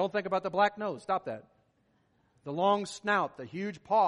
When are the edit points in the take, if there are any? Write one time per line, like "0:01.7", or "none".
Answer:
none